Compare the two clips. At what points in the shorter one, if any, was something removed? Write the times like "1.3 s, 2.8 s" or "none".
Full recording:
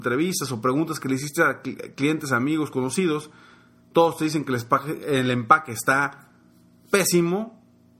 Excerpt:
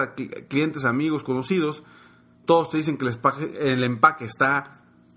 none